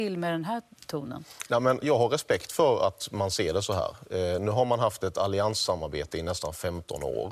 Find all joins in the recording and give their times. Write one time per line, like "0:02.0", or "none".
0:01.8